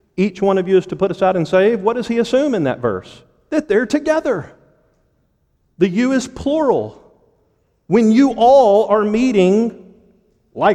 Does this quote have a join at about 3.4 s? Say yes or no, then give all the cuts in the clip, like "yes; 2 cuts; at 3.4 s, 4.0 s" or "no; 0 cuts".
no; 0 cuts